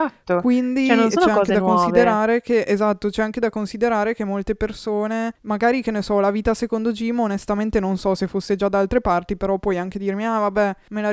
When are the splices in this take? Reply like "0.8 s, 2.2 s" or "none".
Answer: none